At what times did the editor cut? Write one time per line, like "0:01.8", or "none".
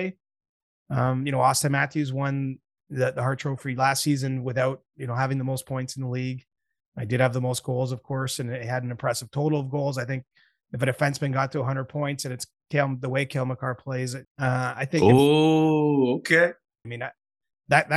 0:14.2
0:16.8

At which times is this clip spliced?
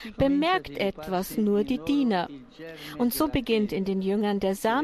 none

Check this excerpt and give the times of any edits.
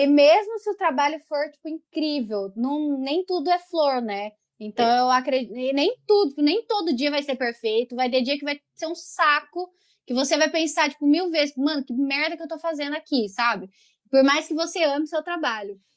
none

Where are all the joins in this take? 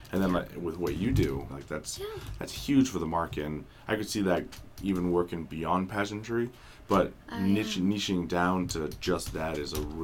0:01.5

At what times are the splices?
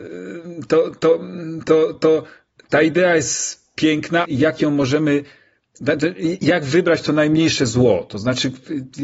0:01.9
0:04.2

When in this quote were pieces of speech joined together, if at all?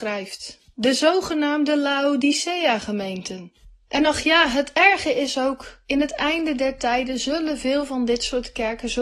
none

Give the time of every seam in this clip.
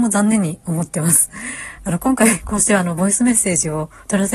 0:01.8

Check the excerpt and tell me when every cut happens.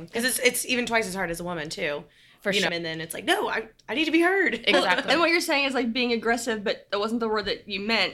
0:02.7

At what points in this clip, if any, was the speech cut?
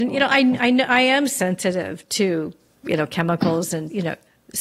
none

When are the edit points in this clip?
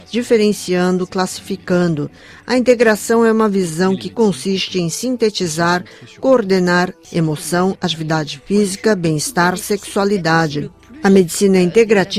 0:07.0

